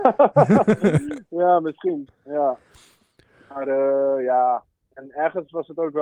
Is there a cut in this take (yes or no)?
no